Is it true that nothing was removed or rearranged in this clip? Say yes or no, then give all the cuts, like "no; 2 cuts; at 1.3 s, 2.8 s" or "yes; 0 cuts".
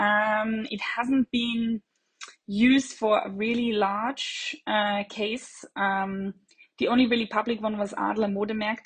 yes; 0 cuts